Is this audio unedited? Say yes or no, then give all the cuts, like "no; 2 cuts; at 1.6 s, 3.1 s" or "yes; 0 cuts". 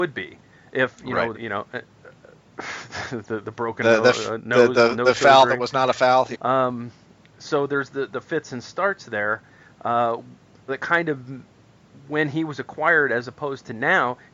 no; 3 cuts; at 1.3 s, 6.3 s, 10.7 s